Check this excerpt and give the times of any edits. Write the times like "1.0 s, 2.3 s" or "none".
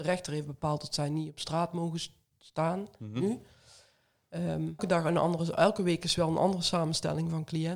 4.8 s